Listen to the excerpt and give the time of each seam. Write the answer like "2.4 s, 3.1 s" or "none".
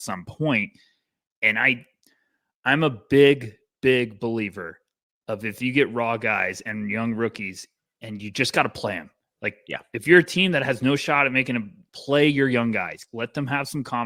11.9 s, 13.1 s